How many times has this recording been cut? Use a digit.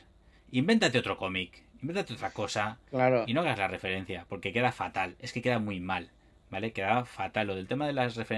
0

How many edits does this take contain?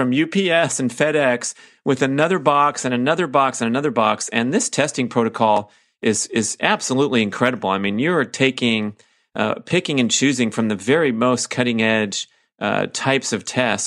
0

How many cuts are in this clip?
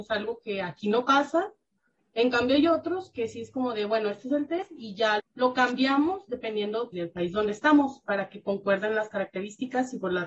2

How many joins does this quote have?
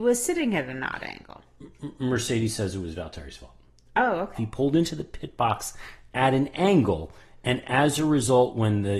1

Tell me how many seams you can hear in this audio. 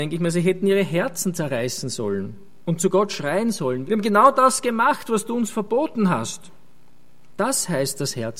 2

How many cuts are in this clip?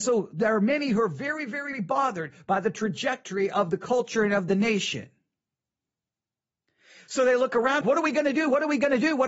2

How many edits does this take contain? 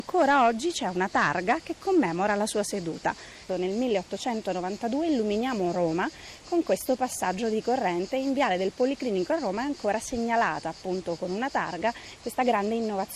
1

